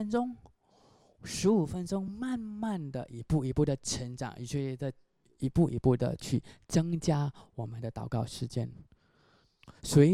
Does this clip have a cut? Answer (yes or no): no